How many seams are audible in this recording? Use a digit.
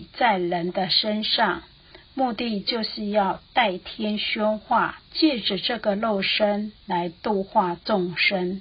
1